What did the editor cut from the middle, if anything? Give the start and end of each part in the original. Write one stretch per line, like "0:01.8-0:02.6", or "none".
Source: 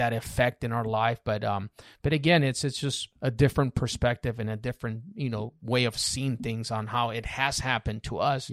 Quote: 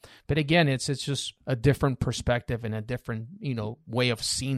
none